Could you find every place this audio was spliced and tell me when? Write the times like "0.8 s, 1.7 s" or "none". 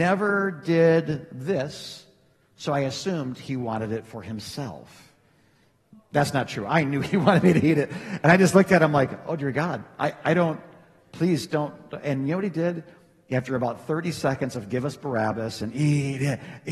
none